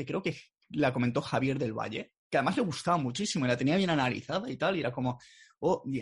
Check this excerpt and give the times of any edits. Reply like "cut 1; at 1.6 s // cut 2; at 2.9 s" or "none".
cut 1; at 2.2 s